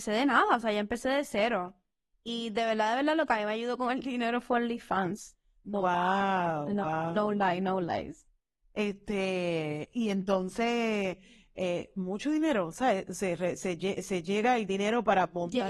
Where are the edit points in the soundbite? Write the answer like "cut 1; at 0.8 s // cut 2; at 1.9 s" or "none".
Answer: none